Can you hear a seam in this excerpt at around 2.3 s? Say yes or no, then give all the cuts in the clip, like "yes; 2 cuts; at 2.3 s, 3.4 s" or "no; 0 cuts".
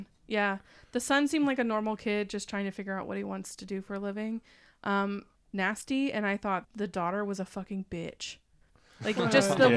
no; 2 cuts; at 5.4 s, 6.6 s